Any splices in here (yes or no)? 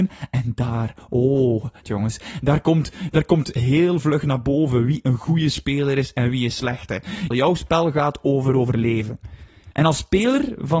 yes